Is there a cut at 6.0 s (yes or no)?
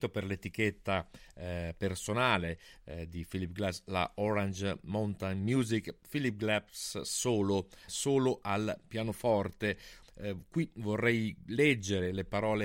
no